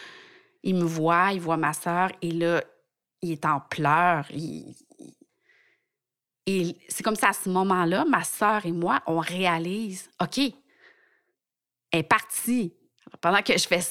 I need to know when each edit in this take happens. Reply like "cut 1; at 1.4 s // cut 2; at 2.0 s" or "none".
cut 1; at 13.0 s